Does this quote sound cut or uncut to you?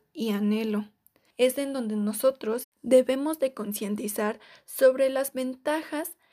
cut